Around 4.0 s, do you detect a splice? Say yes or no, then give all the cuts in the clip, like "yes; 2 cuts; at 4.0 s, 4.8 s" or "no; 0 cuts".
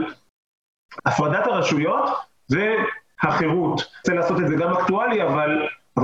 yes; 2 cuts; at 1.0 s, 4.0 s